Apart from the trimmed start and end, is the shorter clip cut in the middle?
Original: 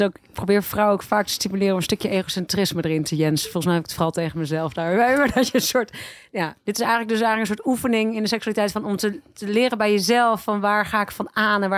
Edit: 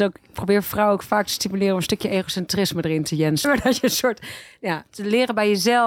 yes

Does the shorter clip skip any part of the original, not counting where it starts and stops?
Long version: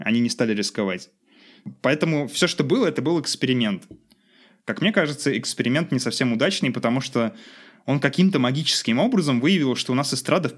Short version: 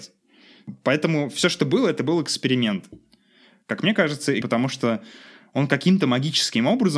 yes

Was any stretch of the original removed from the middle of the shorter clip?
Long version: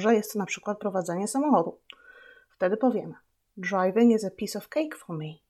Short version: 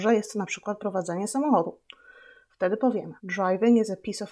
yes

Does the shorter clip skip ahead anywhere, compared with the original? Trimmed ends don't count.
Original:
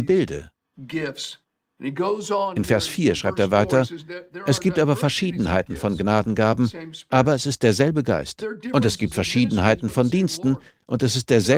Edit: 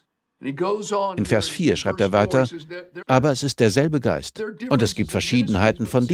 yes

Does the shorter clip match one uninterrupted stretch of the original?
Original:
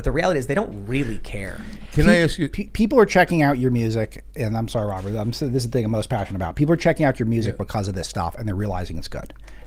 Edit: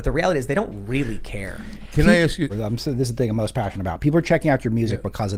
no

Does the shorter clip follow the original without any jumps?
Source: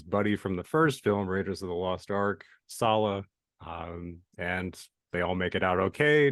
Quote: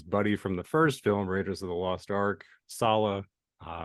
yes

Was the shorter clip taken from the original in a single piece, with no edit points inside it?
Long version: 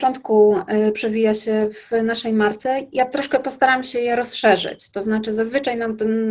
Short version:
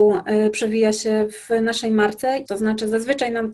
no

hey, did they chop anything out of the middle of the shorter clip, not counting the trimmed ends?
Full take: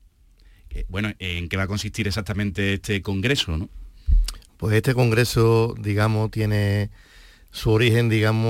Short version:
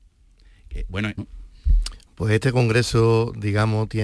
yes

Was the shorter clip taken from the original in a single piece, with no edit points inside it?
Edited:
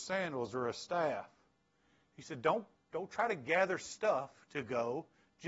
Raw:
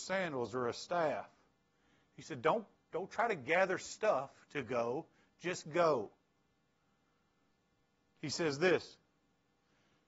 yes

